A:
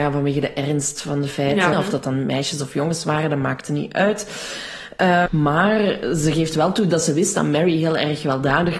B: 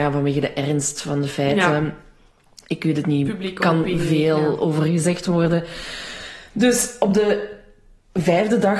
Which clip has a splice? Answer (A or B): A